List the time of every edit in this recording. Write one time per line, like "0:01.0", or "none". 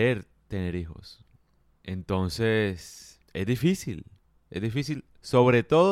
0:01.8
0:03.2